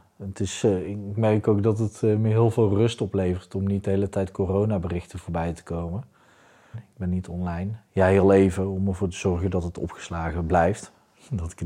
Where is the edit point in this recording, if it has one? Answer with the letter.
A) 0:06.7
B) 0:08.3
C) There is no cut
A